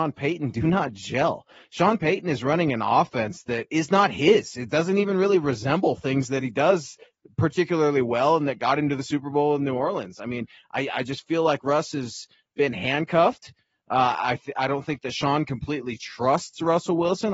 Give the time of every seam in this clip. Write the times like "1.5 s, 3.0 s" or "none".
none